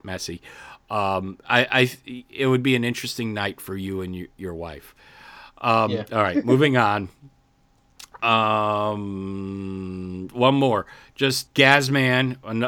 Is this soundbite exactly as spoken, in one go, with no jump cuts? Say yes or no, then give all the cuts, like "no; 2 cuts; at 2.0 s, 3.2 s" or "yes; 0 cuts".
no; 1 cut; at 11.5 s